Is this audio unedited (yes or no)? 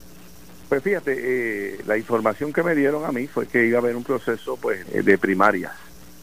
no